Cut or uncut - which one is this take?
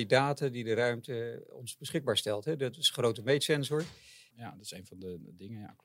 cut